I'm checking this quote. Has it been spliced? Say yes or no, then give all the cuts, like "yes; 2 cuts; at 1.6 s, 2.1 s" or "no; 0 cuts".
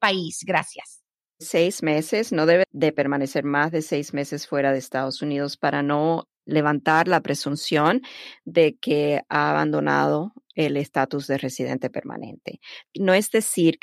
no; 0 cuts